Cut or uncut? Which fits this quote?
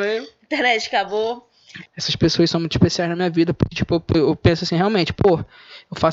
cut